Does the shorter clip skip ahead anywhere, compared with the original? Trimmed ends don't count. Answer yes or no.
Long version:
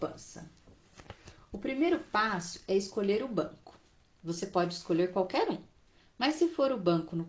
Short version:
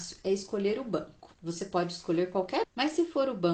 yes